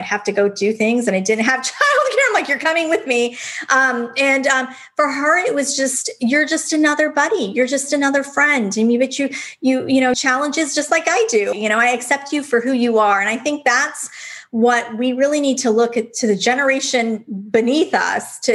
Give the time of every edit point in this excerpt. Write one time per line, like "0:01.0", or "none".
0:10.1
0:11.5